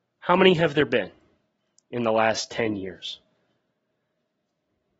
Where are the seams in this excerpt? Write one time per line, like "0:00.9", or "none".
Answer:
none